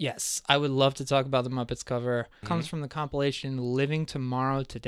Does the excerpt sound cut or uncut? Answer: cut